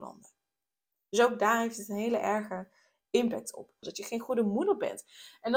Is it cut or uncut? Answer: cut